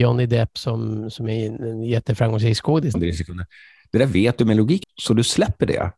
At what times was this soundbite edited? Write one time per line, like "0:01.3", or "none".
0:02.9
0:04.8

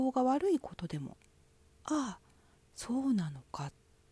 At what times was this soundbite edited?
none

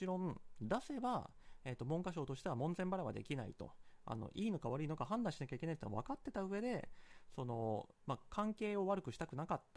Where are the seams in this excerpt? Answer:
none

